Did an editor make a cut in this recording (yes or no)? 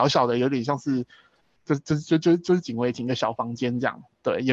no